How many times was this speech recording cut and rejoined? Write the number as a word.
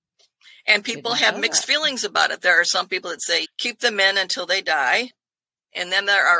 one